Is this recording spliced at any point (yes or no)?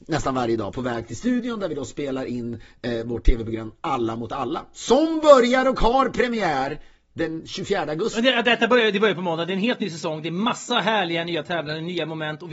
no